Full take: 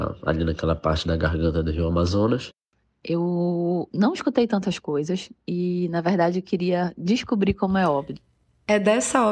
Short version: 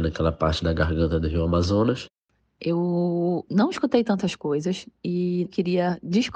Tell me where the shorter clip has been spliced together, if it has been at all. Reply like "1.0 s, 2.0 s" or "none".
5.5 s